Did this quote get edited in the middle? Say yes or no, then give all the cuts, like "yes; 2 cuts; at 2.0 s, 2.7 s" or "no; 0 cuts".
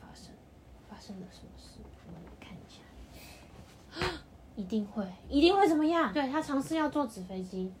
yes; 1 cut; at 6.1 s